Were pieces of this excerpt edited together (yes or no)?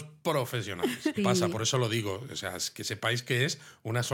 yes